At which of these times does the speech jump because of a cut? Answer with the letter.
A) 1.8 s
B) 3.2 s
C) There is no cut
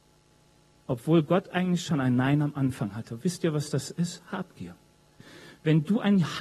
C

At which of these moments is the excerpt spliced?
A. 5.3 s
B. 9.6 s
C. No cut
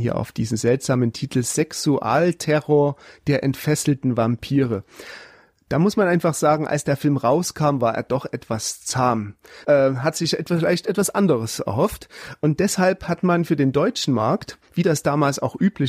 B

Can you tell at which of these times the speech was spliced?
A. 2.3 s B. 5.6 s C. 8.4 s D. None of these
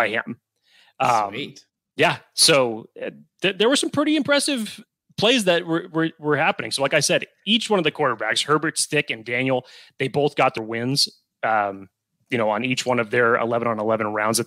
D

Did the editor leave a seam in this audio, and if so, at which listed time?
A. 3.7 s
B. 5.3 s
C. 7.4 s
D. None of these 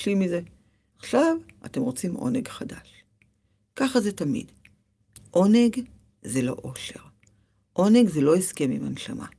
D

